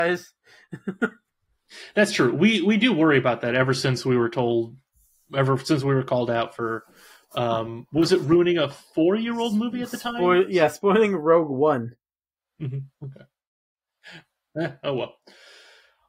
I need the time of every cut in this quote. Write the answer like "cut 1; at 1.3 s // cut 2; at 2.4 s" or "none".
none